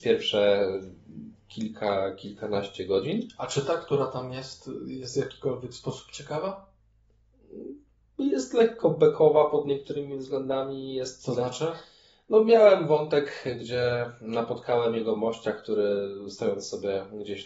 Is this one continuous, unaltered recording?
yes; 0 cuts

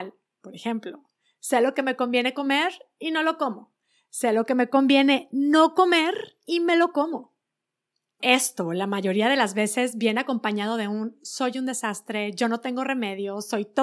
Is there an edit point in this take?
yes; 1 cut; at 8.2 s

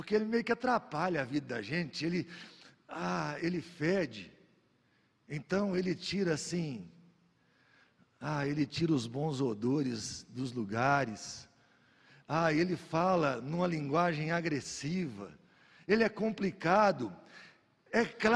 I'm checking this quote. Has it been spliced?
no; 0 cuts

